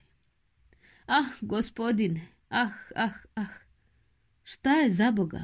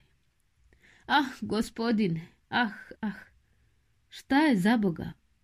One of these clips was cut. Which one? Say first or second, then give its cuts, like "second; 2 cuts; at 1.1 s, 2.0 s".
second; 1 cut; at 2.9 s